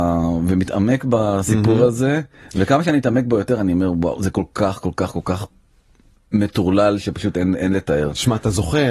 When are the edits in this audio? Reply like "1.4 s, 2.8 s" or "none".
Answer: none